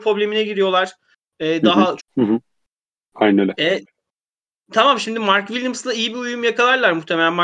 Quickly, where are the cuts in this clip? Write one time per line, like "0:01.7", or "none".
0:02.0